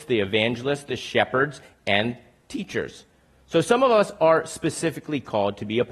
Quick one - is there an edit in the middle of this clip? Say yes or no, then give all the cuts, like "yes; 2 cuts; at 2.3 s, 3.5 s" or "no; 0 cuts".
no; 0 cuts